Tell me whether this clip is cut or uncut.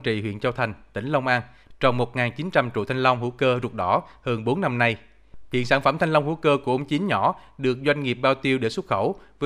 cut